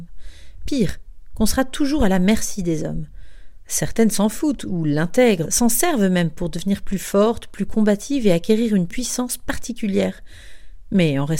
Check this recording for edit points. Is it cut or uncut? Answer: cut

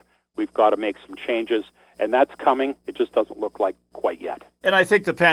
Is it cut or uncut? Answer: uncut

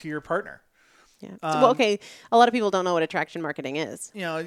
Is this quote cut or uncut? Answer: uncut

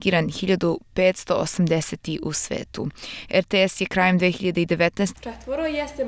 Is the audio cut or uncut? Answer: cut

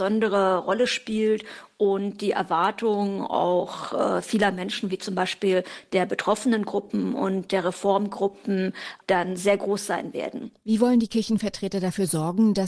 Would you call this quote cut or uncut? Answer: uncut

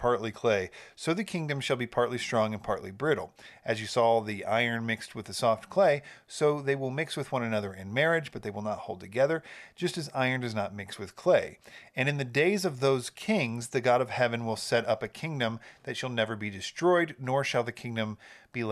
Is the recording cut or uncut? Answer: uncut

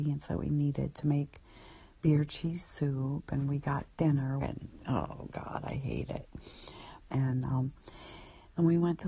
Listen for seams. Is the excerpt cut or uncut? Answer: cut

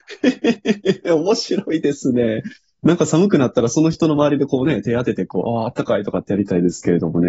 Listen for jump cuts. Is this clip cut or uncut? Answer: uncut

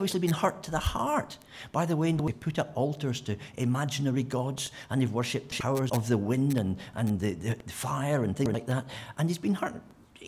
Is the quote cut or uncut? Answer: cut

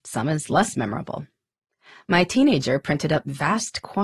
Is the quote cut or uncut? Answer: uncut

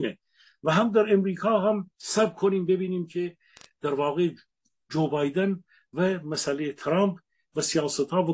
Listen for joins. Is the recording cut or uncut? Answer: cut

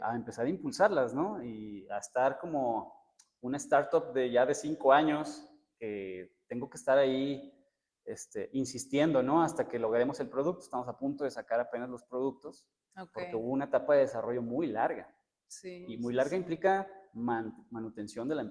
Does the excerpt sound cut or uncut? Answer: uncut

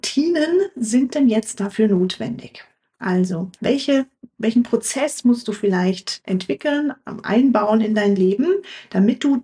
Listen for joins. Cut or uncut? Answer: cut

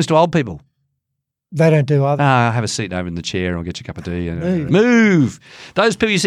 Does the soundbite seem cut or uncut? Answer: cut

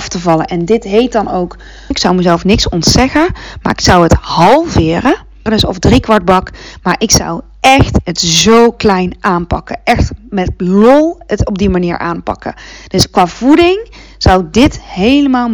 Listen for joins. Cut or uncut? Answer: cut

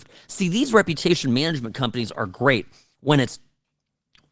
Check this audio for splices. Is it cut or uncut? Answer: uncut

